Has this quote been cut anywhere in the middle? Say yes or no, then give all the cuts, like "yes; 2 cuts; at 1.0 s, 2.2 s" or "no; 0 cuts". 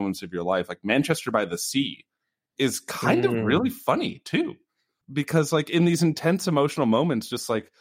no; 0 cuts